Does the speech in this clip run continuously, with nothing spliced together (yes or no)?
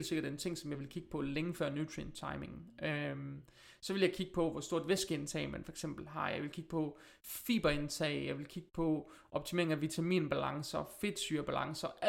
yes